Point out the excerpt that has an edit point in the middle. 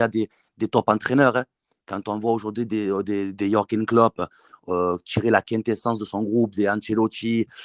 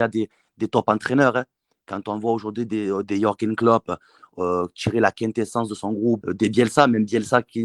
second; 2 cuts; at 3.0 s, 6.2 s

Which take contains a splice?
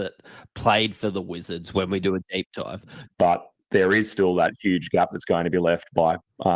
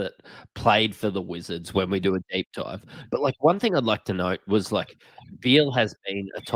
first; 1 cut; at 3.1 s

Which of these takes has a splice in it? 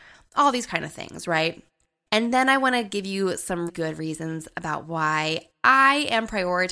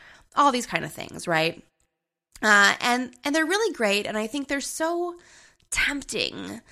first; 2 cuts; at 2.1 s, 3.7 s

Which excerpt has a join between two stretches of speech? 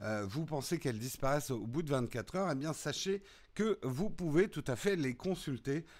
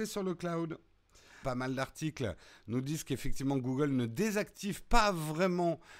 second; 1 cut; at 1.4 s

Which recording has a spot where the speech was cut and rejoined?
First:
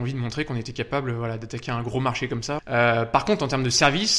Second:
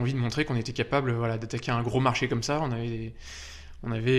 first; 1 cut; at 2.6 s

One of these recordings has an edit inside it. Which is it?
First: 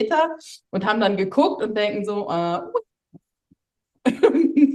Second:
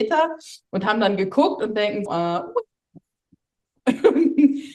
second; 1 cut; at 2.1 s

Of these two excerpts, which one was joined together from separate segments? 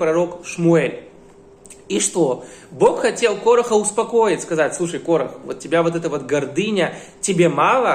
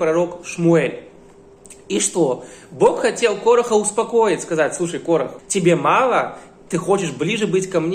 second; 1 cut; at 5.4 s

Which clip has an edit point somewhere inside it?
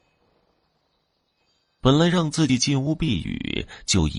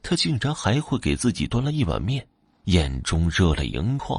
second; 1 cut; at 2.6 s

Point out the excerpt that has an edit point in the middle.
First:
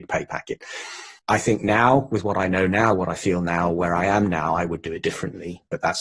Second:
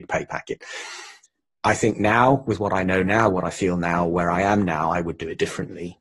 first; 1 cut; at 1.2 s

